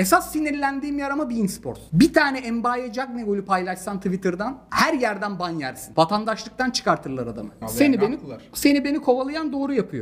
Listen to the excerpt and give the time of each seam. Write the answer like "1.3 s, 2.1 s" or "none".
7.6 s